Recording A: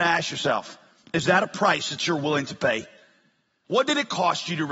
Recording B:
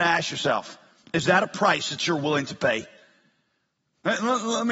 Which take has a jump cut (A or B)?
A